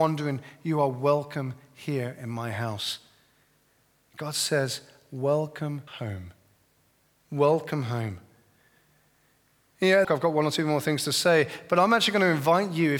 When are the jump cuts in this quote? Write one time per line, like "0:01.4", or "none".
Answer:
0:05.9
0:10.0